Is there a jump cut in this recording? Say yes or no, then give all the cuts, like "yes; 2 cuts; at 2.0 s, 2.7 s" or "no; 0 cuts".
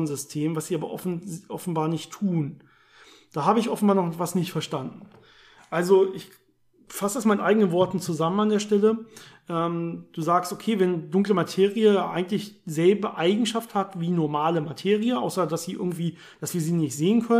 no; 0 cuts